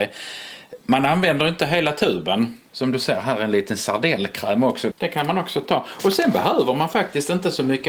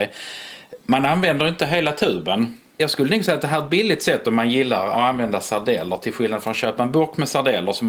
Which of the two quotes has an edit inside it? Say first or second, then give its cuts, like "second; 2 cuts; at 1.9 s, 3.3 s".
first; 2 cuts; at 2.7 s, 4.9 s